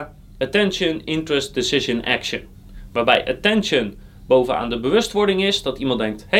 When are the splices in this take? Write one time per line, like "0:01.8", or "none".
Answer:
none

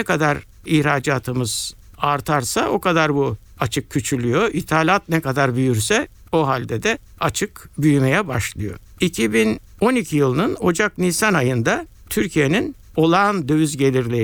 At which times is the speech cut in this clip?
none

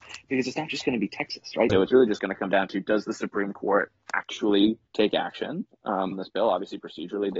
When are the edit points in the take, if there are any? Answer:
0:01.7
0:04.9
0:06.1

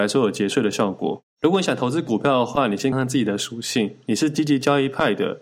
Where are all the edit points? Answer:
0:02.9

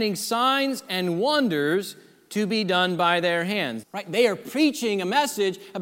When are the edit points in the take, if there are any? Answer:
0:03.8

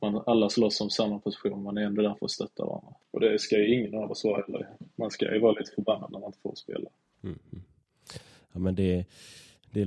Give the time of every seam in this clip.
0:03.0
0:07.1

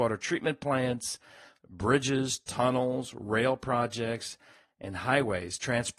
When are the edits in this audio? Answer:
none

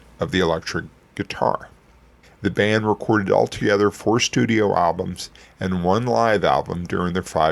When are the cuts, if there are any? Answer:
0:02.2

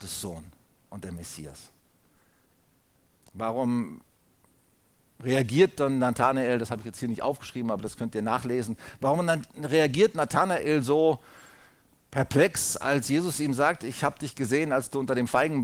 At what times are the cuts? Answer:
0:03.2

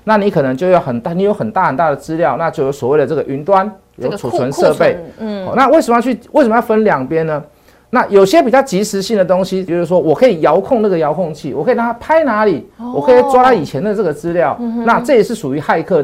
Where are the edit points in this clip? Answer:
0:09.7

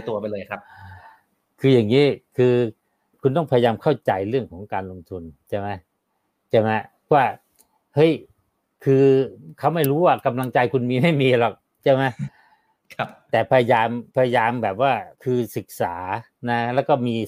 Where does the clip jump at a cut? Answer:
0:14.1
0:15.1

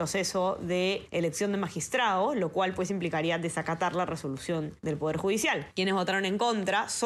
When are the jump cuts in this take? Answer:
none

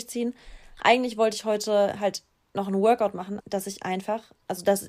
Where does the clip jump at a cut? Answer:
0:03.4

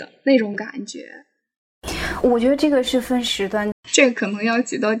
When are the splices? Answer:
0:02.2
0:03.7

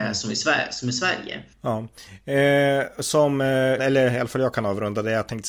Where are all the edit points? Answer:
0:01.5
0:03.8

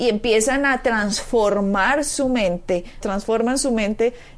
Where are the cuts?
0:03.0

